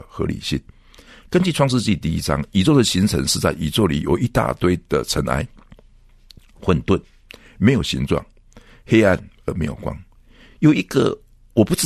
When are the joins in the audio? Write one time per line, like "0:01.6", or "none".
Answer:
none